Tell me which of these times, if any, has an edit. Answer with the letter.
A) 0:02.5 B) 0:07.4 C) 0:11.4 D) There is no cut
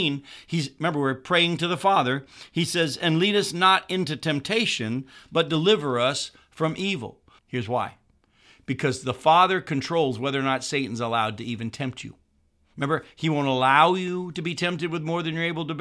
B